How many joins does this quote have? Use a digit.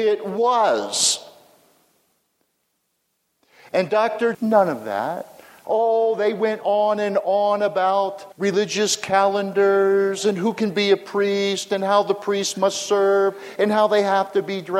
3